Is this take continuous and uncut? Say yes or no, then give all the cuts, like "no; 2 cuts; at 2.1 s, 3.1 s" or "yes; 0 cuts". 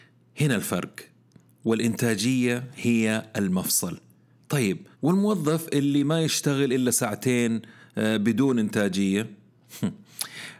no; 1 cut; at 4.9 s